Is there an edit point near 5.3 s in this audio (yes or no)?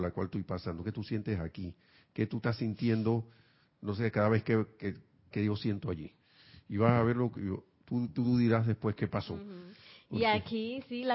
yes